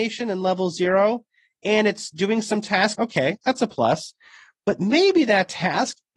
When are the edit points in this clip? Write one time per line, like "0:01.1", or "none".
0:02.9